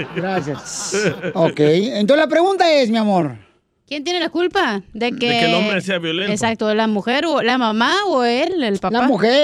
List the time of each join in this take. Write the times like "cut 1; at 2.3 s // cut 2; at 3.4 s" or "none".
none

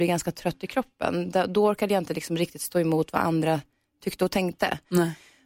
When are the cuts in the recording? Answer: none

